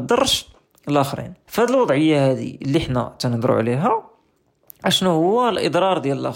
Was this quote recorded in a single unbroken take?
no; 1 cut; at 1.5 s

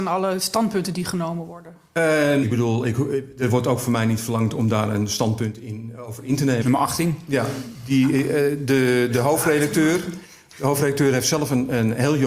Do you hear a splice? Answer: yes; 2 cuts; at 2.4 s, 6.6 s

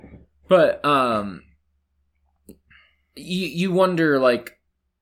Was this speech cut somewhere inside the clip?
no; 0 cuts

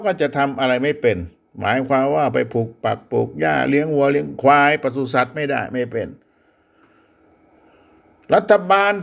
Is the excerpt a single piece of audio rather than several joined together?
yes; 0 cuts

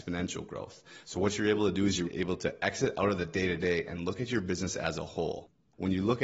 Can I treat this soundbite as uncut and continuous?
no; 2 cuts; at 1.0 s, 2.0 s

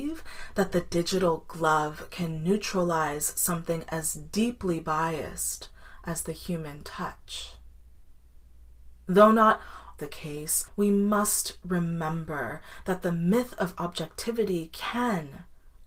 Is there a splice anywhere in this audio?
yes; 1 cut; at 10.0 s

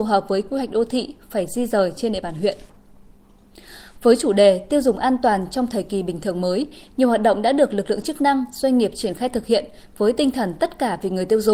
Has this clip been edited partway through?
yes; 1 cut; at 3.9 s

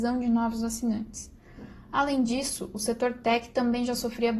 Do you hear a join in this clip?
no; 0 cuts

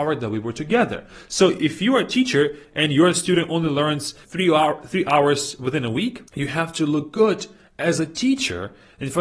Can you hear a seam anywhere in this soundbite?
yes; 2 cuts; at 4.2 s, 6.3 s

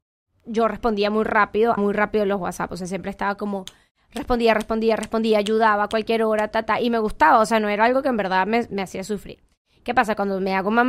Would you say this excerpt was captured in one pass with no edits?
no; 1 cut; at 1.8 s

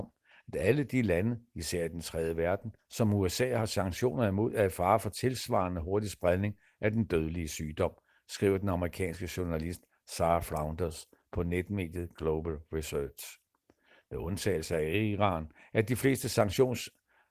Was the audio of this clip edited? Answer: no; 0 cuts

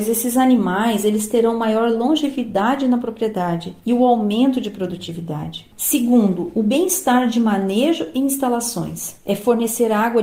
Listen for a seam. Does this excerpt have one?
yes; 1 cut; at 5.7 s

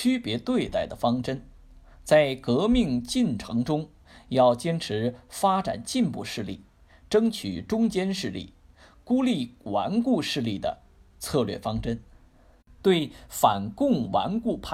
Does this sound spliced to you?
no; 0 cuts

